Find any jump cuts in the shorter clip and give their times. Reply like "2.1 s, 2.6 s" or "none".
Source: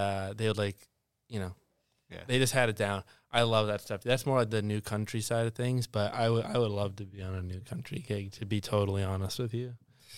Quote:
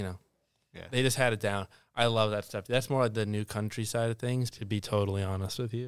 4.5 s